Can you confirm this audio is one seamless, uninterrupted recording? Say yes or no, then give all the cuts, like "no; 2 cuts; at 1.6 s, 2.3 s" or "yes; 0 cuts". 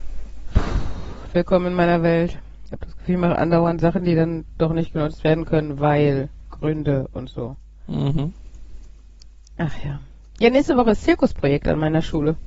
yes; 0 cuts